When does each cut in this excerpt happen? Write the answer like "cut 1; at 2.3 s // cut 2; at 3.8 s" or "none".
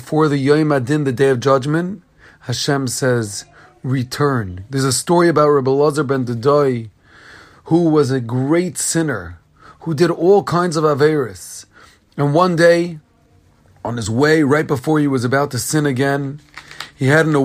cut 1; at 4.7 s